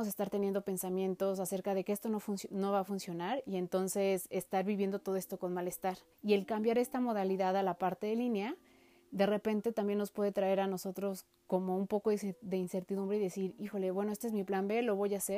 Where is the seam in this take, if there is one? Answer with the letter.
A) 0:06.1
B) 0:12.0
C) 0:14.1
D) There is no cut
A